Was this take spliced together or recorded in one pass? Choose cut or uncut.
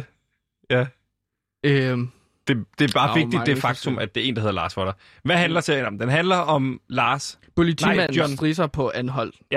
uncut